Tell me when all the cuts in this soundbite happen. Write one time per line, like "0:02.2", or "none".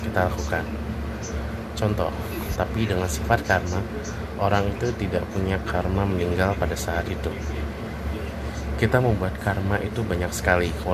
0:02.6